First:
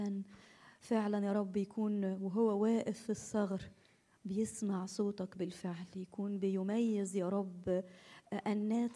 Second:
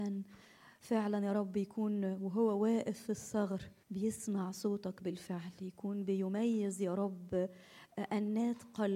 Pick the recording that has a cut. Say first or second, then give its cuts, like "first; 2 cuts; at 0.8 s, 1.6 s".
second; 1 cut; at 3.8 s